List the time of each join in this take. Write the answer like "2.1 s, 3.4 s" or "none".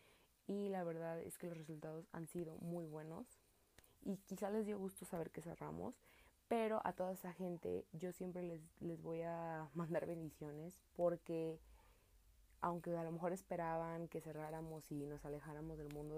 3.8 s